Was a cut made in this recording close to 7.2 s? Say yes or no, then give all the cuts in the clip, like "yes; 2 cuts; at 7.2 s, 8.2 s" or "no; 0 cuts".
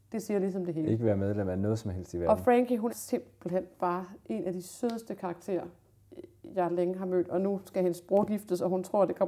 no; 1 cut; at 2.9 s